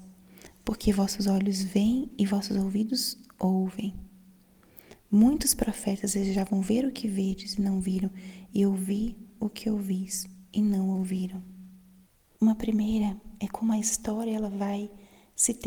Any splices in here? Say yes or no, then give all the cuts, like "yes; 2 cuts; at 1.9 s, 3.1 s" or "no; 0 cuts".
yes; 1 cut; at 12.4 s